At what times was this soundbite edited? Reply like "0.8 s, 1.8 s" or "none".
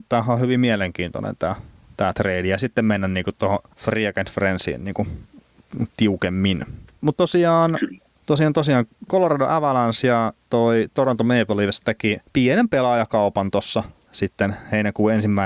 none

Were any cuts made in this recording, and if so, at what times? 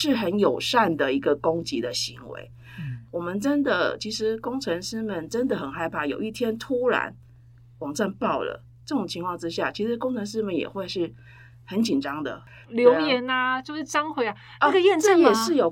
3.1 s, 12.6 s

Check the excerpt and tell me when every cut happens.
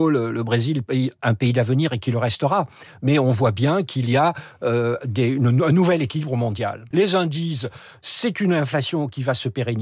6.9 s

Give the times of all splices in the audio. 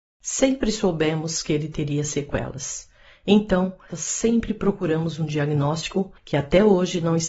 3.9 s

